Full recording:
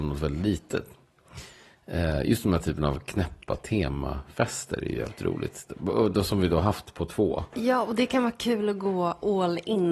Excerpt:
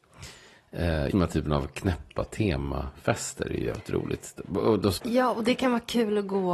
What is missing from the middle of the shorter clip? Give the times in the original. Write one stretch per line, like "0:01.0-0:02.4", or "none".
0:02.3-0:02.4
0:06.3-0:07.5